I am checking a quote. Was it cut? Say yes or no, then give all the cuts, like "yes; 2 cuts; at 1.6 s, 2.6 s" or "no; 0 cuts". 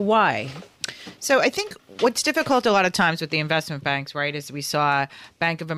no; 0 cuts